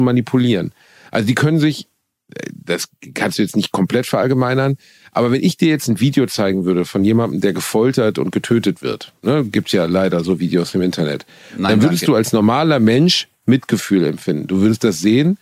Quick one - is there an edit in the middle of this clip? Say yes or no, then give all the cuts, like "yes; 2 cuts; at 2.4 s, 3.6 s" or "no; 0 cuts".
no; 0 cuts